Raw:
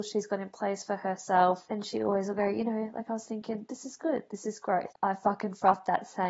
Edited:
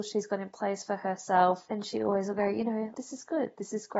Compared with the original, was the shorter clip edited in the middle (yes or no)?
yes